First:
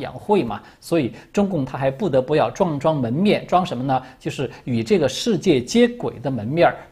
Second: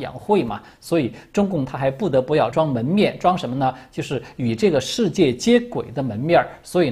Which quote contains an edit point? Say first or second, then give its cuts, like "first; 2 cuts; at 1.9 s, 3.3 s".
second; 1 cut; at 2.5 s